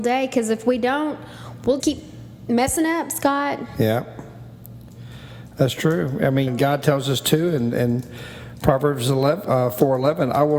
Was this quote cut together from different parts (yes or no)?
yes